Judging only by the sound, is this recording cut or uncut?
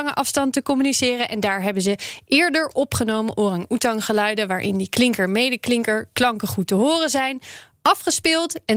uncut